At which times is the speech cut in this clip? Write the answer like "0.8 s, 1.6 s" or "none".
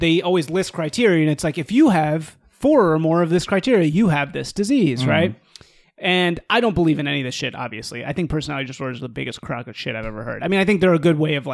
none